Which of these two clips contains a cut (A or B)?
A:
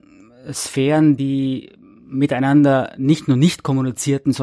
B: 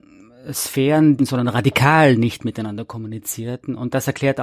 B